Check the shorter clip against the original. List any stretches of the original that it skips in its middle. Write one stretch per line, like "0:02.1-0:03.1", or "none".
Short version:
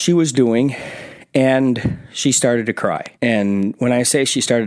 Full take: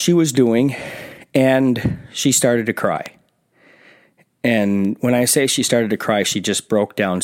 0:03.1-0:04.4